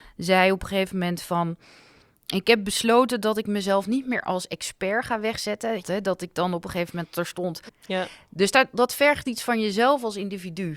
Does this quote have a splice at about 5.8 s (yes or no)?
yes